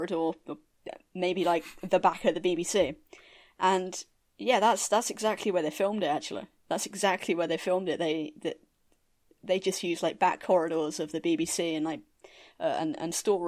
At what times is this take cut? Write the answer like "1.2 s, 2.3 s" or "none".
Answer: none